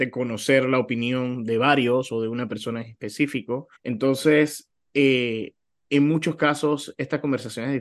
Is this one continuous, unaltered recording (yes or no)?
no